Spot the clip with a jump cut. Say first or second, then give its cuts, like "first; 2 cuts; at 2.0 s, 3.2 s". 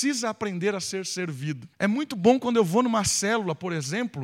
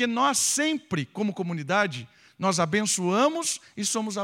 first; 1 cut; at 1.7 s